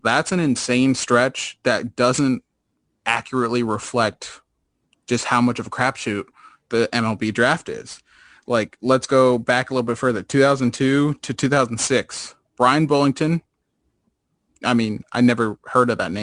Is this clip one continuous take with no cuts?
yes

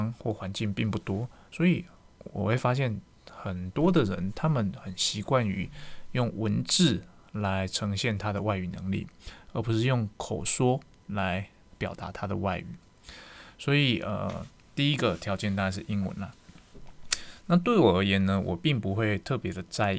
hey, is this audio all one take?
yes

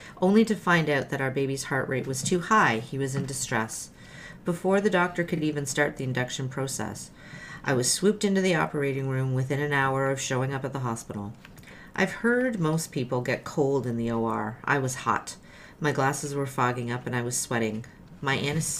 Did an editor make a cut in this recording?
no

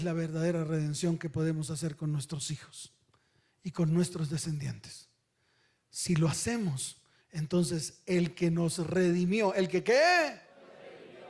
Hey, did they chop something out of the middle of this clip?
no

